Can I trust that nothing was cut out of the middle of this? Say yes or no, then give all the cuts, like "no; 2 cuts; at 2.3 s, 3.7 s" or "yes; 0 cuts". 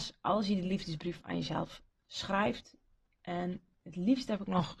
yes; 0 cuts